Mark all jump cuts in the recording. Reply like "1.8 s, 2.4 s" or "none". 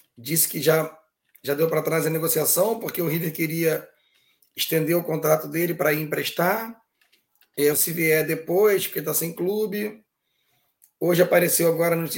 7.7 s